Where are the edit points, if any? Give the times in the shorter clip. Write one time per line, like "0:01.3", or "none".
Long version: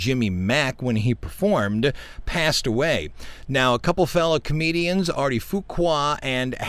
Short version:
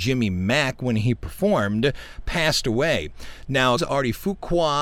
0:03.8